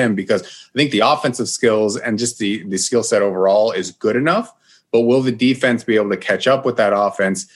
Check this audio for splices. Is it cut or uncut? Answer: uncut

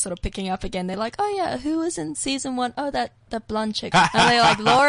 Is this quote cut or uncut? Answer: cut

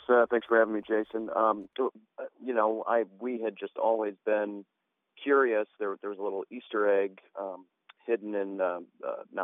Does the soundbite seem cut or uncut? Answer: cut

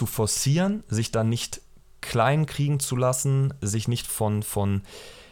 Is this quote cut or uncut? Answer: cut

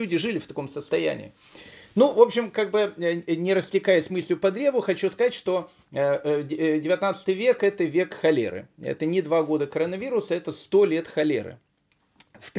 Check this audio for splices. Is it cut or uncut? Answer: uncut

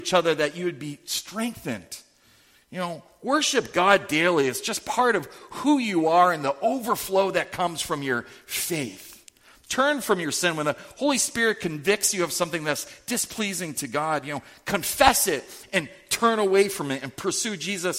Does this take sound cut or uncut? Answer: uncut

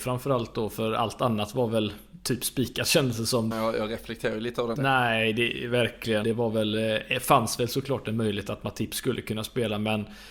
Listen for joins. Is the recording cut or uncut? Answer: cut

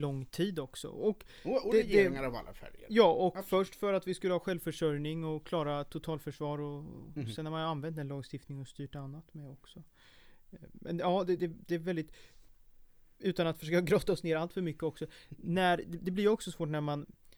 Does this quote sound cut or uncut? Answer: uncut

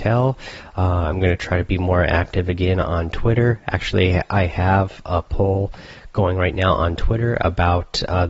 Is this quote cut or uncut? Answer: uncut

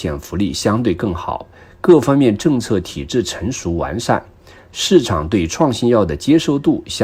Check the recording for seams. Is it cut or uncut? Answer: uncut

